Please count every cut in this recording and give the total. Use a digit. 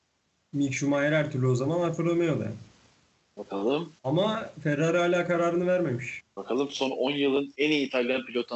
2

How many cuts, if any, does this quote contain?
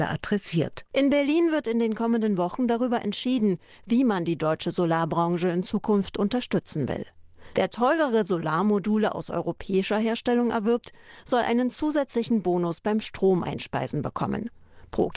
1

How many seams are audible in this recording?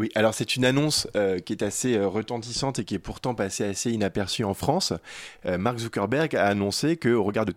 0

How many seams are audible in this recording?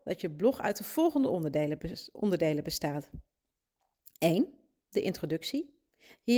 0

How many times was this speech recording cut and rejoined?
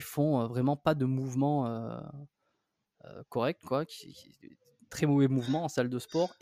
0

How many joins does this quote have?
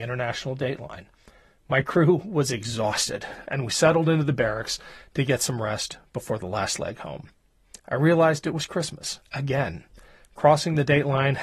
1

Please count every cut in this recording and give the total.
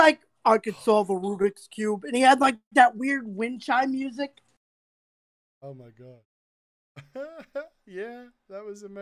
0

